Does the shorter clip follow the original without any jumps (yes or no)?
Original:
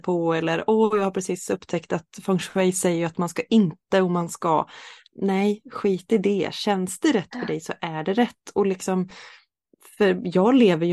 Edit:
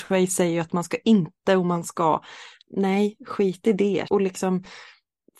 no